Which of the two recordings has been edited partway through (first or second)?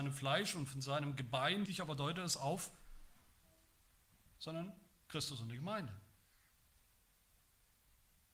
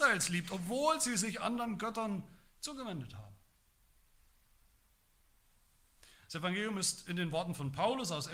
first